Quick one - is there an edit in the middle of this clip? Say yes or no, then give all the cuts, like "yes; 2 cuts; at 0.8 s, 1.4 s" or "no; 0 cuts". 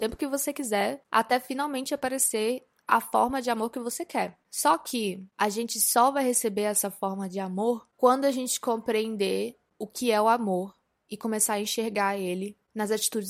yes; 1 cut; at 5.3 s